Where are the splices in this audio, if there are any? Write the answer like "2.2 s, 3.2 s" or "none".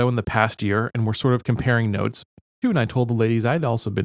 2.6 s